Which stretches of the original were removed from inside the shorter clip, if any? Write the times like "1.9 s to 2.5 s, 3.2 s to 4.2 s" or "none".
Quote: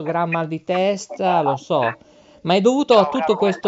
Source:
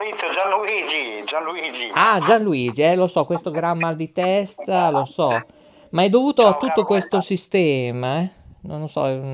none